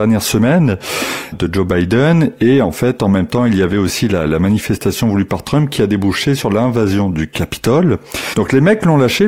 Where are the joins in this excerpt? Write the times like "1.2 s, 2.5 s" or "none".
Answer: 1.3 s, 8.3 s